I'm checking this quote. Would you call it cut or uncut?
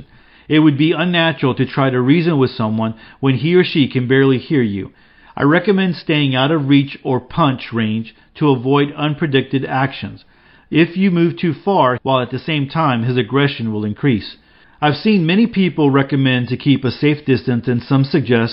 cut